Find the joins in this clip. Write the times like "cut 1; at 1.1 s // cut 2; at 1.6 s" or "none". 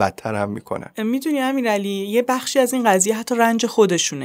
none